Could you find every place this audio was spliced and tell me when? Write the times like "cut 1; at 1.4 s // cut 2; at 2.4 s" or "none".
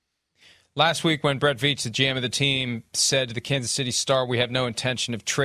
none